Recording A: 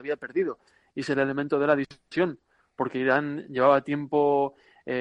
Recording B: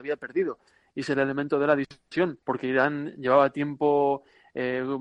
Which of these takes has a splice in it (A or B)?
B